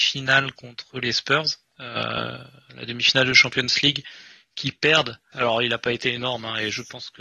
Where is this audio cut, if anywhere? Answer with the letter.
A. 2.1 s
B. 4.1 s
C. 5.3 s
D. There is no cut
C